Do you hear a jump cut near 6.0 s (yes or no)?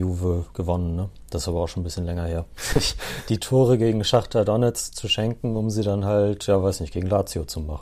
no